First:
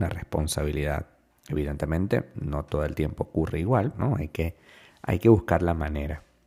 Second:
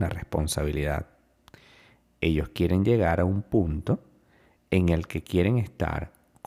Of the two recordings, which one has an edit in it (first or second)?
first